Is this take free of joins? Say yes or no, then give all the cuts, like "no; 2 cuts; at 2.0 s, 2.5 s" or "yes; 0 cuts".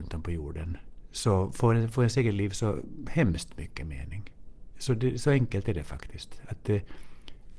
no; 1 cut; at 4.7 s